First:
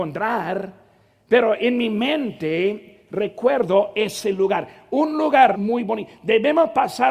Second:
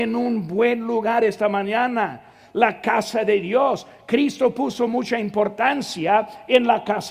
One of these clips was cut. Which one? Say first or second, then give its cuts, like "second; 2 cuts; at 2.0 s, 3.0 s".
first; 1 cut; at 5.5 s